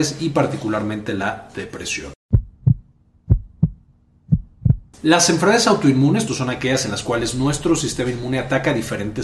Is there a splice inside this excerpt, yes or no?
yes